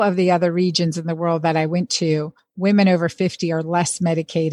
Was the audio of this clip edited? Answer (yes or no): no